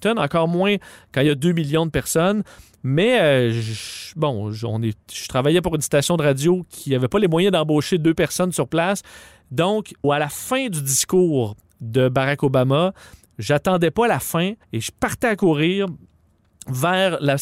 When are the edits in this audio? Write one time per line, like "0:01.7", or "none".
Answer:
0:10.0
0:14.6